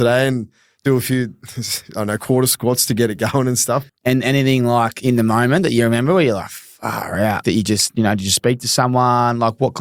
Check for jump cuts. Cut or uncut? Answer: cut